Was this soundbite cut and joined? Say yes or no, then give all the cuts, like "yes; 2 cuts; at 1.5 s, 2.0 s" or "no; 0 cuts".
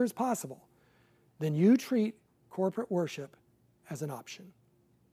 no; 0 cuts